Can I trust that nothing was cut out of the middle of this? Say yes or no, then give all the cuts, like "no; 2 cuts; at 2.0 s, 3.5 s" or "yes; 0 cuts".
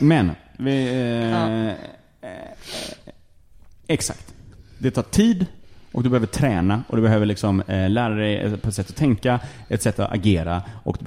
yes; 0 cuts